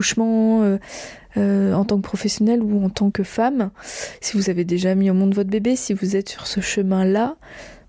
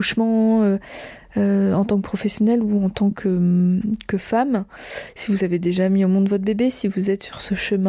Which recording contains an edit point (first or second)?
first